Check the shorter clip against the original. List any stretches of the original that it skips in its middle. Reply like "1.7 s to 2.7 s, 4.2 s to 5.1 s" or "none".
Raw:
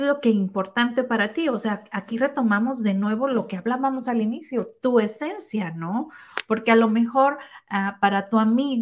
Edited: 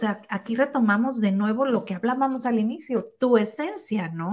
none